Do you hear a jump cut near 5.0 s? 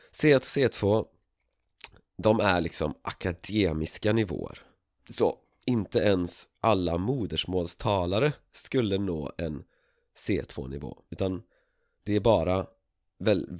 yes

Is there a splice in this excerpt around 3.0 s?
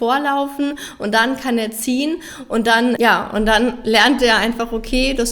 yes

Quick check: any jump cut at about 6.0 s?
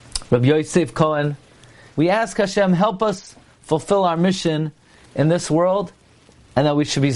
no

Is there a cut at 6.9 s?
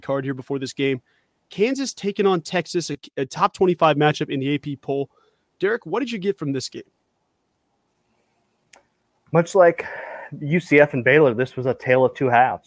no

